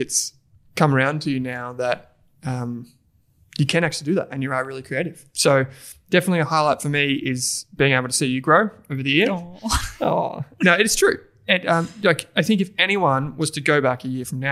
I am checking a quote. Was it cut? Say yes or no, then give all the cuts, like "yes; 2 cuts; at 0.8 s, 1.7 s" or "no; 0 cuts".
no; 0 cuts